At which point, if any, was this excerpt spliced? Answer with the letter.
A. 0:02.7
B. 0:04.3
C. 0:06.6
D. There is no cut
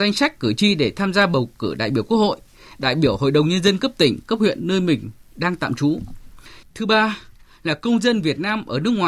C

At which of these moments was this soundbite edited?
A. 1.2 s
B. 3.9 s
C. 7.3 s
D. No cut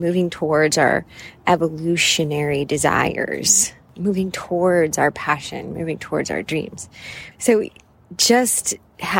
C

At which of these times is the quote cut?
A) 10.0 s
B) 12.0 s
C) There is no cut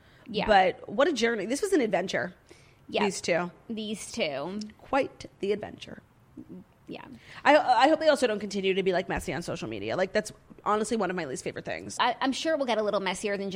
B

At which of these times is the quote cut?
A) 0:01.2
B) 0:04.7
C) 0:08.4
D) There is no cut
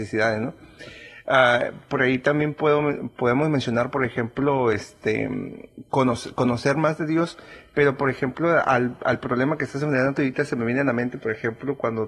D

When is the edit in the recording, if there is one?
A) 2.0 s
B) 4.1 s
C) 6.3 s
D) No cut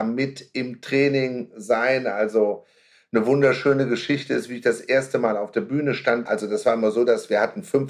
C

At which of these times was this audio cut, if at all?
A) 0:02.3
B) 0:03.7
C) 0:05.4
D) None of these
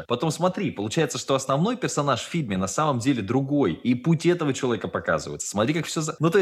C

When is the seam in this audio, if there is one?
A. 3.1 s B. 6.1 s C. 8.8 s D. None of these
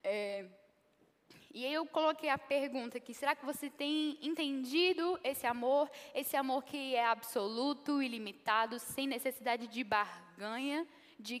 D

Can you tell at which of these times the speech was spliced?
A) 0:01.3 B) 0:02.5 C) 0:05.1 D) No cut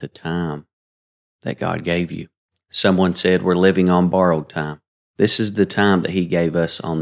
C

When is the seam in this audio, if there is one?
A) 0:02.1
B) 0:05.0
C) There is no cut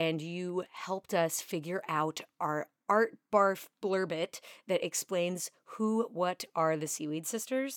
C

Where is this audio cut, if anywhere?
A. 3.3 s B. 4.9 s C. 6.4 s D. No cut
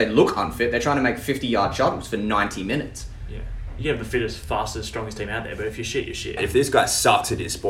C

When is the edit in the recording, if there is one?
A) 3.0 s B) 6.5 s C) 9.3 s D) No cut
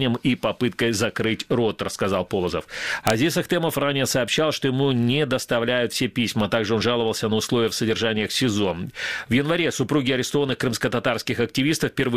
A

